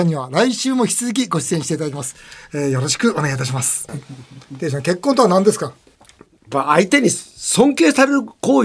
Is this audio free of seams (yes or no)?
no